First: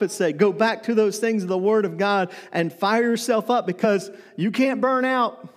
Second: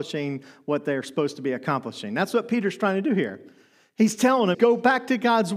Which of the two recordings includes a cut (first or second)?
second